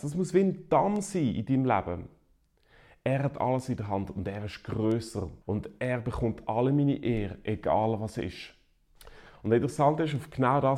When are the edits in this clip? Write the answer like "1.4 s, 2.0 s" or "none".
5.4 s